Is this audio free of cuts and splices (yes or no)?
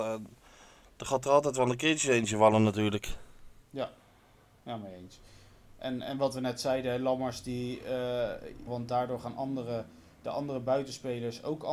no